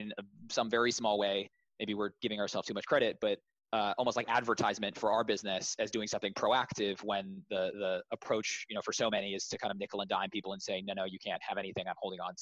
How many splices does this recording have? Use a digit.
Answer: 0